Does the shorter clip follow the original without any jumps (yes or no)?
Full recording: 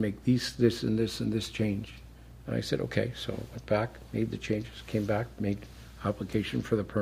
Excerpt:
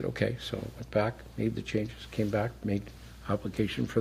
yes